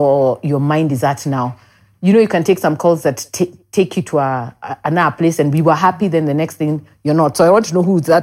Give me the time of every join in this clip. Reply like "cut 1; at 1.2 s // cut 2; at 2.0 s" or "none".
none